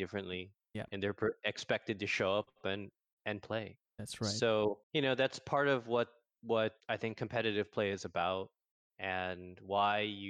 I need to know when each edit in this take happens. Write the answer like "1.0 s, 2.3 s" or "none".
4.8 s, 6.8 s